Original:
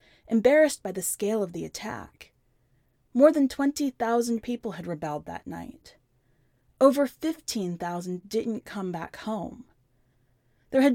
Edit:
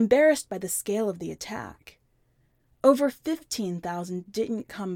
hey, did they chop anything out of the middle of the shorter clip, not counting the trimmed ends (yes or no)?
yes